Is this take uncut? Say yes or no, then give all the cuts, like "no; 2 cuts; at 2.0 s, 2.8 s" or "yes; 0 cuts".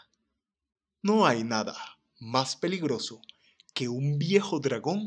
yes; 0 cuts